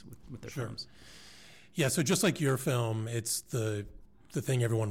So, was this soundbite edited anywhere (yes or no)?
no